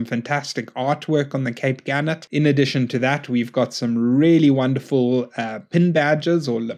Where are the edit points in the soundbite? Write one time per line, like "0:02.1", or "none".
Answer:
none